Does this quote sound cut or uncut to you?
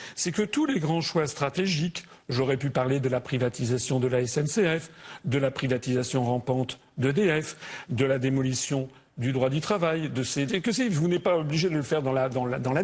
cut